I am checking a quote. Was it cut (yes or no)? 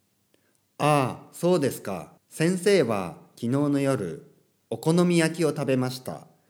yes